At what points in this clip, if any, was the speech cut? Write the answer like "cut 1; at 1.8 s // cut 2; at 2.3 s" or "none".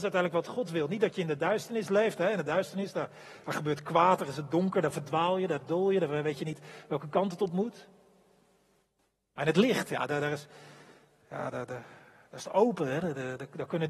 none